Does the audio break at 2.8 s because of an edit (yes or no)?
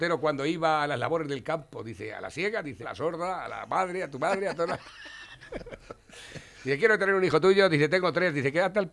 yes